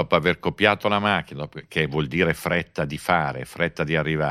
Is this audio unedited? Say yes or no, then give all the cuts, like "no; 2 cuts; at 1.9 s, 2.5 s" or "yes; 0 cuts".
yes; 0 cuts